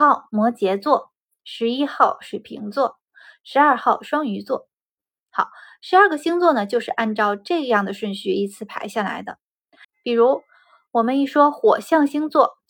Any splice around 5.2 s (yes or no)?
no